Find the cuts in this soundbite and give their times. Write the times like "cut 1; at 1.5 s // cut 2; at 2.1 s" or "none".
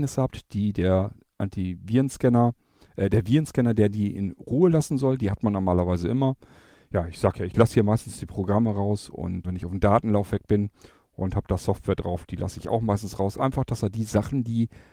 cut 1; at 9.4 s